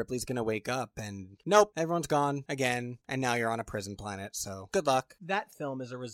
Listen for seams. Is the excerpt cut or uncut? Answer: uncut